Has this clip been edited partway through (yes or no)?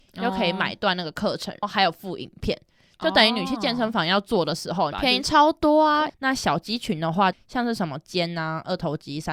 yes